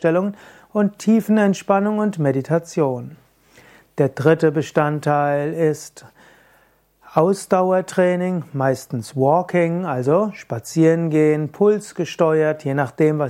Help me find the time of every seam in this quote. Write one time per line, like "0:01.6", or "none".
none